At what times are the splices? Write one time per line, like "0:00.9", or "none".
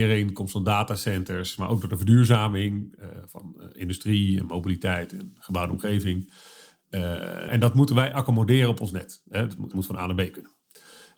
0:07.5
0:09.7